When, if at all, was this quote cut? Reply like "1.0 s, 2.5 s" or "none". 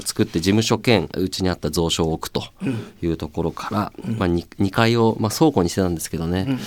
1.1 s